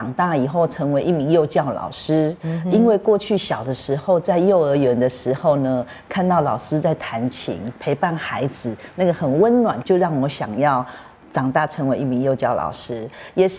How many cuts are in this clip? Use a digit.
1